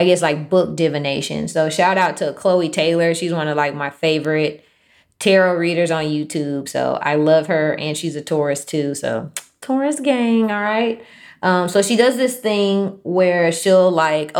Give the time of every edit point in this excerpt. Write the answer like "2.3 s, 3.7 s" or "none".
none